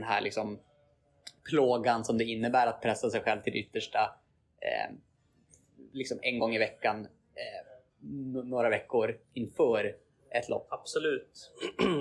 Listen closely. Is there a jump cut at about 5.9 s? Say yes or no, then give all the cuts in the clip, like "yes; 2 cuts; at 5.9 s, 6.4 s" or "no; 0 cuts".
no; 1 cut; at 10.7 s